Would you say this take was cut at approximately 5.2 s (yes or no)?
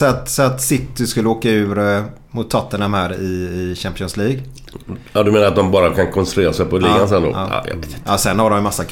no